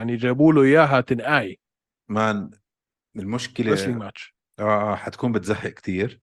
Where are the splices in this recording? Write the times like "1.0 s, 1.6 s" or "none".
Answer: none

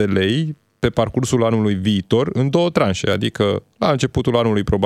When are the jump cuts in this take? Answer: none

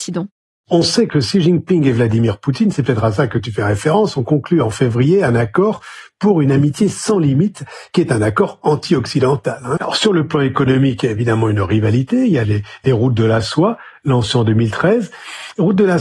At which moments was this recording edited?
9.8 s

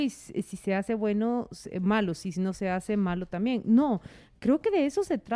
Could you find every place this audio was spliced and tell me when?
none

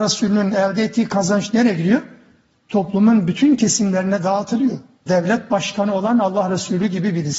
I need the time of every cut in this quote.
5.1 s

